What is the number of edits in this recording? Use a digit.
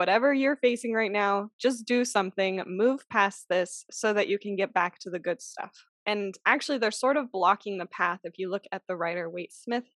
1